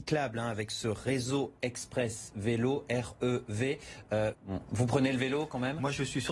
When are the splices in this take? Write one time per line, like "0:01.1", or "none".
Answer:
0:04.3